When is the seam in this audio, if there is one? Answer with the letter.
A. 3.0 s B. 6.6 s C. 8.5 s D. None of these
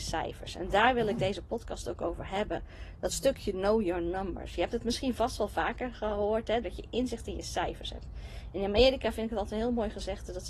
B